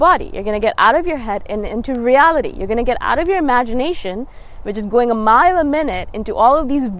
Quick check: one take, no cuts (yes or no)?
yes